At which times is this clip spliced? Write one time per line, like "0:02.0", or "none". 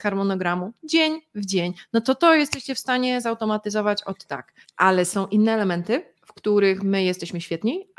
0:04.6
0:06.1